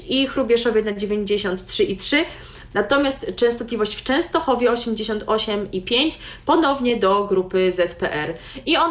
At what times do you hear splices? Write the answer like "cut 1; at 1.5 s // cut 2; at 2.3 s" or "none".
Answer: cut 1; at 2.7 s